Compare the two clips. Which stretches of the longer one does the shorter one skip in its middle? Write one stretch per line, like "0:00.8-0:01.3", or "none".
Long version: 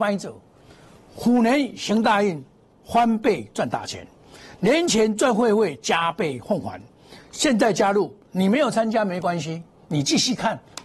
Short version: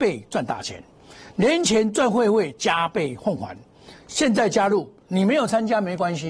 none

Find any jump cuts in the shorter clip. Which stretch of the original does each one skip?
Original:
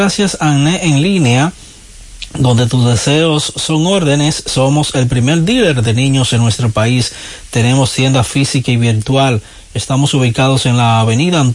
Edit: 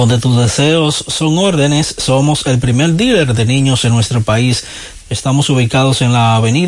0:07.5-0:09.6

